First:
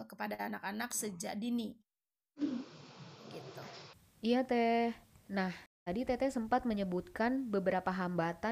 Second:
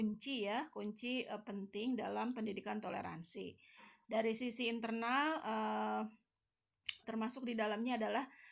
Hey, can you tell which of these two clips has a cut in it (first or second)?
second